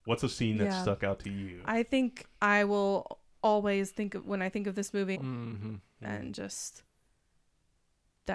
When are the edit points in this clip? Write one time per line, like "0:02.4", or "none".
0:02.3
0:05.1